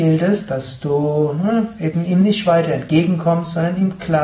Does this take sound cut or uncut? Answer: uncut